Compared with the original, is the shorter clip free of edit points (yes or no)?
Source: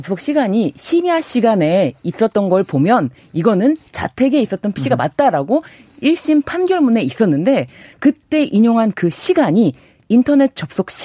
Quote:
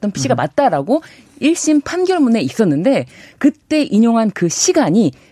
yes